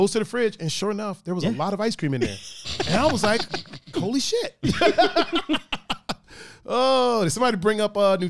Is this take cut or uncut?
cut